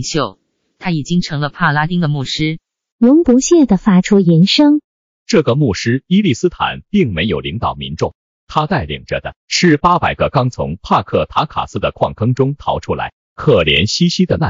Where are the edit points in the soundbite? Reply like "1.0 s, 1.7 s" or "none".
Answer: 2.9 s